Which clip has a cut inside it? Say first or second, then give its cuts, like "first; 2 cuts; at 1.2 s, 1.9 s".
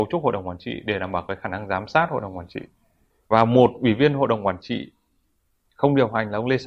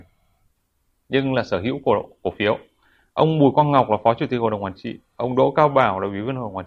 first; 1 cut; at 3.1 s